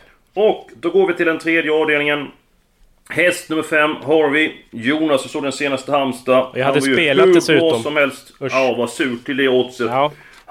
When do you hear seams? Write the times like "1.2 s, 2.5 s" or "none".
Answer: none